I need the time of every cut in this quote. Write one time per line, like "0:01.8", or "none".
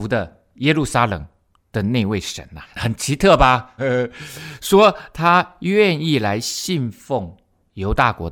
0:02.6
0:03.8